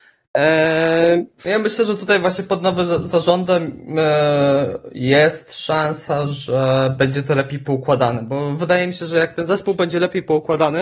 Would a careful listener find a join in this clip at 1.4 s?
yes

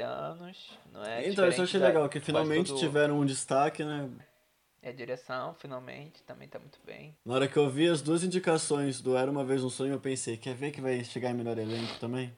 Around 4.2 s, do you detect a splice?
yes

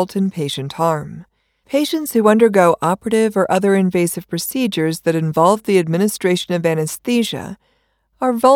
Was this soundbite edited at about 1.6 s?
yes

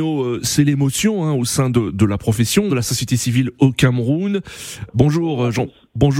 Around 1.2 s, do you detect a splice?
no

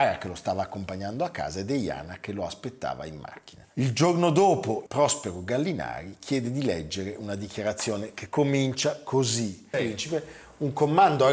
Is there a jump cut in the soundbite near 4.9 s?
yes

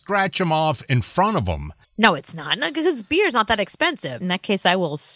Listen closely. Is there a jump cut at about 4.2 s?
yes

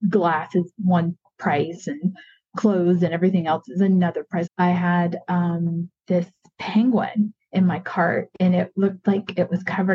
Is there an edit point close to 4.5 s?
yes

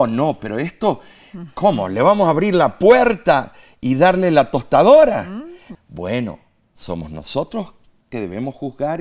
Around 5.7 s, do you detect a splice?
yes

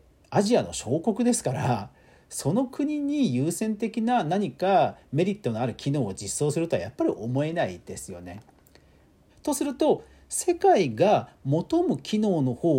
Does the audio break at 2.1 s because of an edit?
no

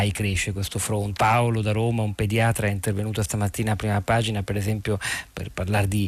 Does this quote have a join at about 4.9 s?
no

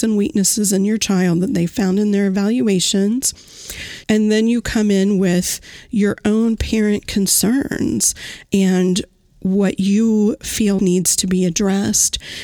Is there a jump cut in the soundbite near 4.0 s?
yes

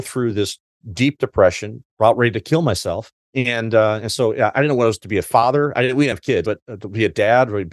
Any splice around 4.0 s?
no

